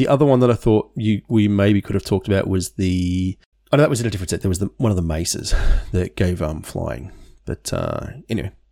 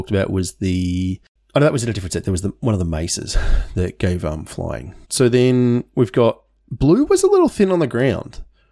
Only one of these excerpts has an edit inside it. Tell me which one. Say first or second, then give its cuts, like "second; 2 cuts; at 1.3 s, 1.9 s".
second; 1 cut; at 5.0 s